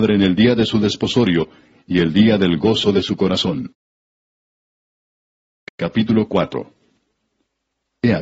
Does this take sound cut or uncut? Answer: uncut